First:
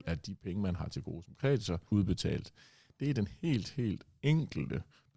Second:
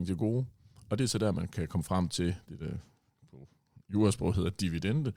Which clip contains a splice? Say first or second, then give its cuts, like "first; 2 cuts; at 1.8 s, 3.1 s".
first; 1 cut; at 1.9 s